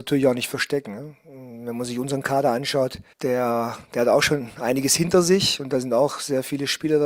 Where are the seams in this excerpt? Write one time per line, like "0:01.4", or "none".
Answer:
0:03.1